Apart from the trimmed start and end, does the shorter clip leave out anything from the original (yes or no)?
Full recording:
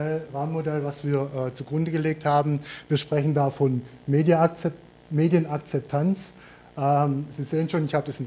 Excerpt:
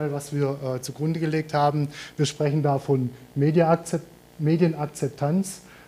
no